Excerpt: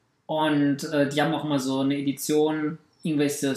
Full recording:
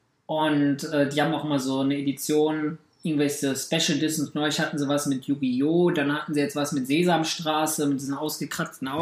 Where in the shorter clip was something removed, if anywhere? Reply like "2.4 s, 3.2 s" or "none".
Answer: none